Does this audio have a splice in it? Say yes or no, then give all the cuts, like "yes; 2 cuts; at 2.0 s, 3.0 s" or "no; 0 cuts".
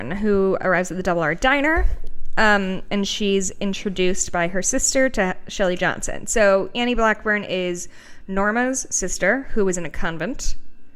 no; 0 cuts